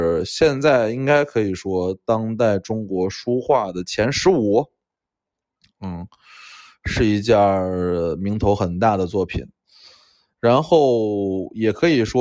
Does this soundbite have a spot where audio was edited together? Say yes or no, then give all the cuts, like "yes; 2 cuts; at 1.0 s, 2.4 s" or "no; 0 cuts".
no; 0 cuts